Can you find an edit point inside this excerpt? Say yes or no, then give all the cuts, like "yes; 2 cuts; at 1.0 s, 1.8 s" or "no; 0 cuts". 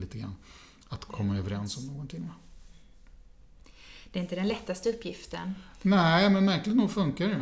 yes; 1 cut; at 1.1 s